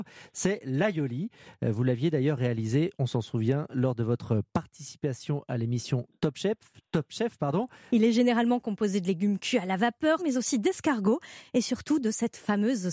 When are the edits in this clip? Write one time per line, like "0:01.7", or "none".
0:07.9
0:10.2